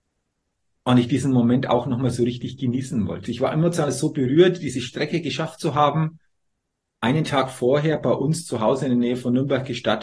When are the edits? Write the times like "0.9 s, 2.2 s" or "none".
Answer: 3.3 s